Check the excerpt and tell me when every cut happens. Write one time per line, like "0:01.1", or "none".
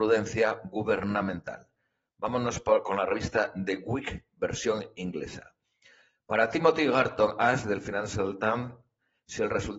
none